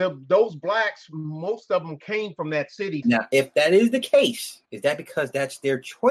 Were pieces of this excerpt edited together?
yes; 2 cuts; at 3.0 s, 4.6 s

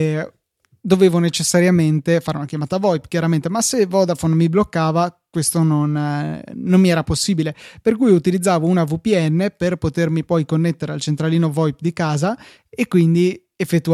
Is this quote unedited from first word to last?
yes; 0 cuts

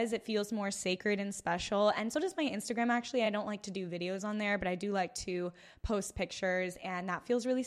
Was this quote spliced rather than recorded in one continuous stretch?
no; 0 cuts

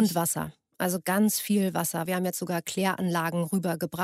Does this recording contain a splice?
yes; 1 cut; at 2.1 s

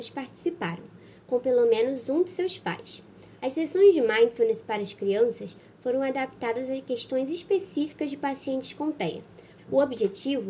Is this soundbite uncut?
no; 1 cut; at 9.6 s

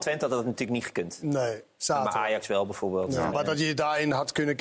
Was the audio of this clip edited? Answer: yes; 1 cut; at 3.3 s

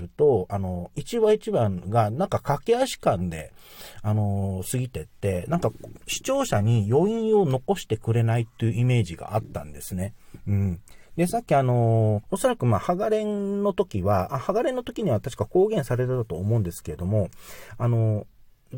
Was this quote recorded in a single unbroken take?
no; 2 cuts; at 11.1 s, 12.2 s

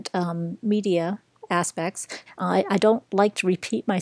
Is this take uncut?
no; 1 cut; at 2.3 s

